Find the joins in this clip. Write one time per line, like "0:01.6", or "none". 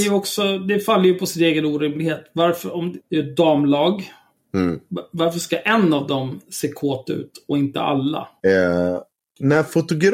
0:03.0
0:08.4

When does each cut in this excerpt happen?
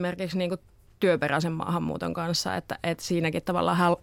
none

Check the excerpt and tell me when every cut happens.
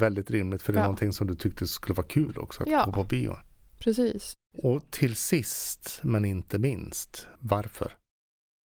0:07.4

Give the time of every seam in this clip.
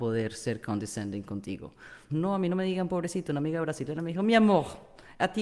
0:02.1

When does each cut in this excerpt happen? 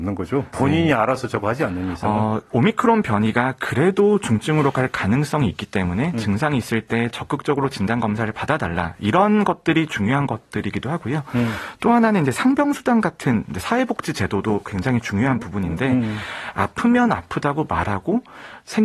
none

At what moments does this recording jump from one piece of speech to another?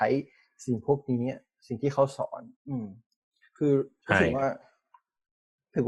0:02.6

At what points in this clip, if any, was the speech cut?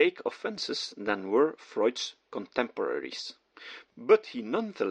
none

